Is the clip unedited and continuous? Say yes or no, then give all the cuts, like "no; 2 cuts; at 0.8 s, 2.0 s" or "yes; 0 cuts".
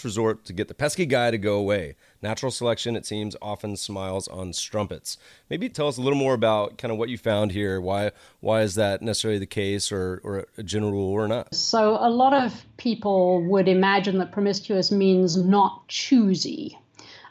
no; 1 cut; at 11.5 s